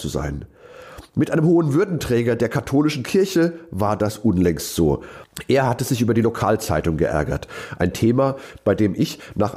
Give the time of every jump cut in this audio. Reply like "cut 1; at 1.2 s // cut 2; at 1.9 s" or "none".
none